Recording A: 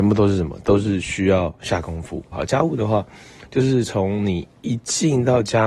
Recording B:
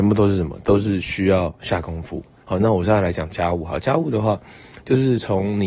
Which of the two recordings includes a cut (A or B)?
A